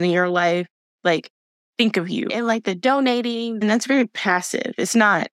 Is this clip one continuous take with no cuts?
no; 2 cuts; at 2.3 s, 3.6 s

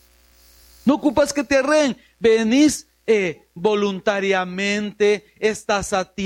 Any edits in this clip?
no; 0 cuts

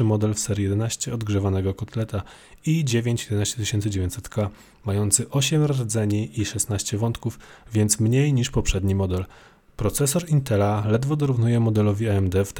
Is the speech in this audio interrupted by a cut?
no; 0 cuts

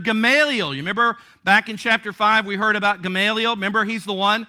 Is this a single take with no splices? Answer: yes; 0 cuts

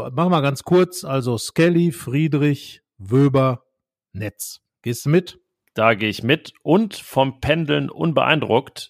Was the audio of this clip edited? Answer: no; 0 cuts

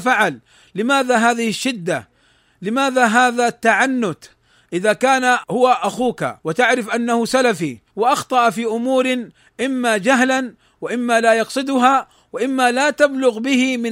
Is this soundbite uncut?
no; 2 cuts; at 6.4 s, 7.9 s

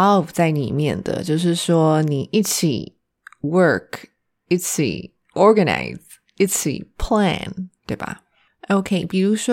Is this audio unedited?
no; 1 cut; at 7.8 s

